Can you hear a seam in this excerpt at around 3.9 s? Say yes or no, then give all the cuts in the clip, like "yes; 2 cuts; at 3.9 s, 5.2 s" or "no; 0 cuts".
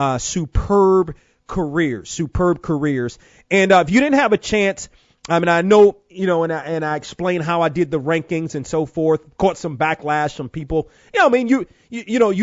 no; 0 cuts